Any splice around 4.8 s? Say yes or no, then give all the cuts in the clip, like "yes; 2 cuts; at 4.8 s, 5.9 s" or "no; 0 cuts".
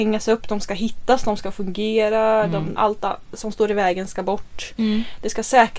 no; 1 cut; at 2.8 s